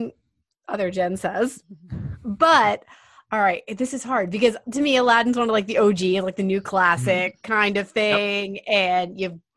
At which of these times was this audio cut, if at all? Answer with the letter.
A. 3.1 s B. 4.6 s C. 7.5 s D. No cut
B